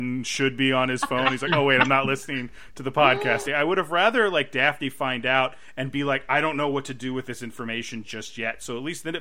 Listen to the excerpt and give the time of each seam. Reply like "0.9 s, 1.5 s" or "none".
3.4 s